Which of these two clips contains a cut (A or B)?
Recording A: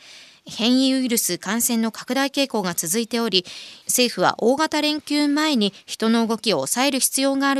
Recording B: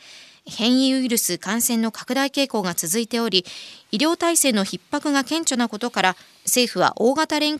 A